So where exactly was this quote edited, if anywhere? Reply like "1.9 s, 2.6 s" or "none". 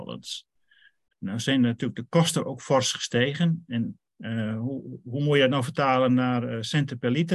1.1 s, 4.1 s